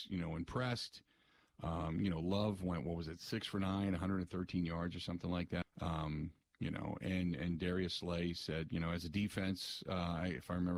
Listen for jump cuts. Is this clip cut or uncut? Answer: cut